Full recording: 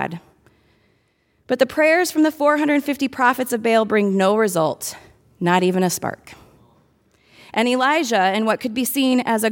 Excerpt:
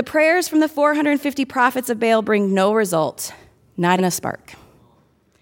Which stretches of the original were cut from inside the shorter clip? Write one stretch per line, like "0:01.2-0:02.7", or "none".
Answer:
0:05.6-0:05.8